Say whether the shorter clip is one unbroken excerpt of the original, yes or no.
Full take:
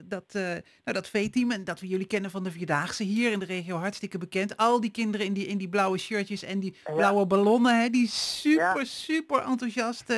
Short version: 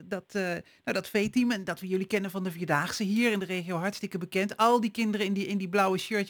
yes